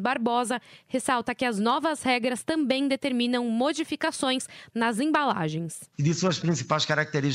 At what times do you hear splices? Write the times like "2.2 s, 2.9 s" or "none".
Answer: 5.9 s